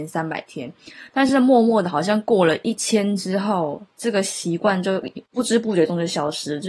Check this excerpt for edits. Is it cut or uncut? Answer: uncut